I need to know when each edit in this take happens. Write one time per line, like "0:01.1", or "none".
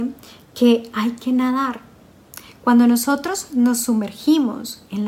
none